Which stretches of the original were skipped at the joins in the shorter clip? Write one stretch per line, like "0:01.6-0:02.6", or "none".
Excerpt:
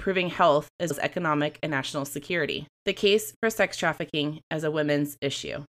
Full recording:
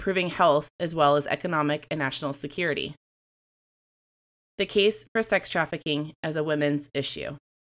0:00.9-0:01.2
0:03.0-0:04.5